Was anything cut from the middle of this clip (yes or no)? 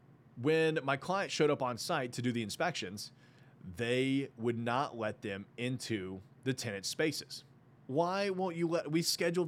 yes